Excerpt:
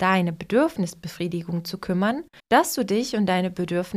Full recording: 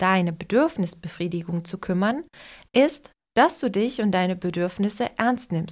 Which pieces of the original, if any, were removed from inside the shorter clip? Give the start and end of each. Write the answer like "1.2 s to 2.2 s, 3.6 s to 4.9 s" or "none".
2.4 s to 3.2 s